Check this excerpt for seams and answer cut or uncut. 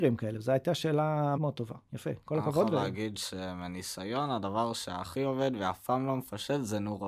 cut